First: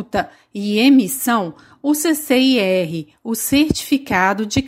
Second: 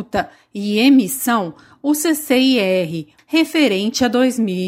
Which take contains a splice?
second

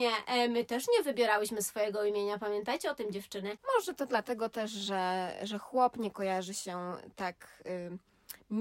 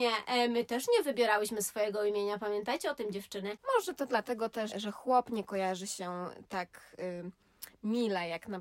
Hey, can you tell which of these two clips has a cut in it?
second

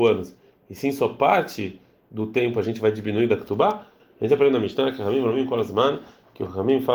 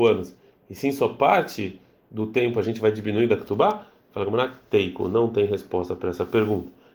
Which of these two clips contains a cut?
first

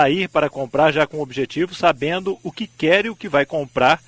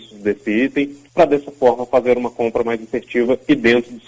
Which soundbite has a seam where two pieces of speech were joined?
second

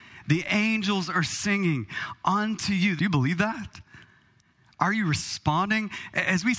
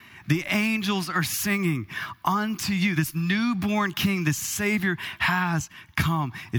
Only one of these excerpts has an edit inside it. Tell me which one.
first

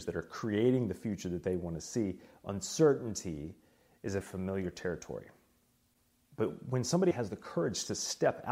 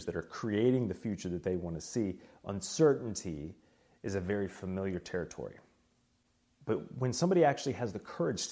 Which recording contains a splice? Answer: first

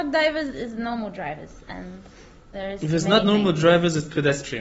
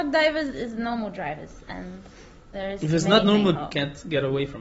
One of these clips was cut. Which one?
second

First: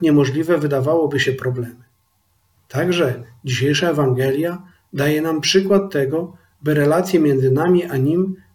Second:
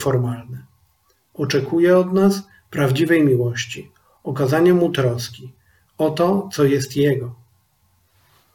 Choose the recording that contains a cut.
first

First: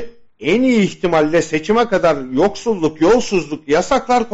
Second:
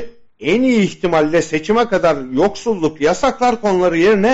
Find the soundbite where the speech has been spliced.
second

